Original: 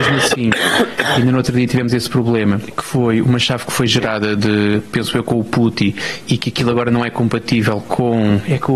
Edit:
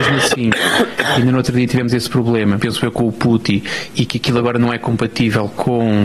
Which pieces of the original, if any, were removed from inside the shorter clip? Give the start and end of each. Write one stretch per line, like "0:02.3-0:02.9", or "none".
0:02.6-0:04.9